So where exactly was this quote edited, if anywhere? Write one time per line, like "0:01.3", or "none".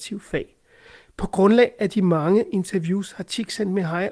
none